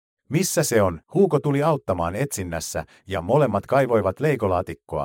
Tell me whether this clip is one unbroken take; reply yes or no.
no